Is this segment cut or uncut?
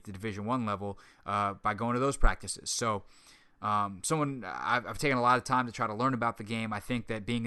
uncut